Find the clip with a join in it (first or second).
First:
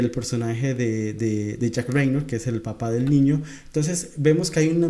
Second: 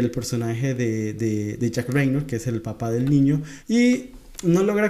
second